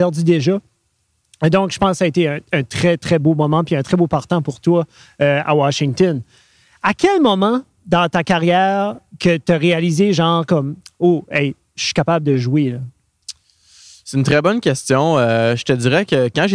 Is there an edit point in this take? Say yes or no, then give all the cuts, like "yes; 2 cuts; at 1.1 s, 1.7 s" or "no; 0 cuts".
no; 0 cuts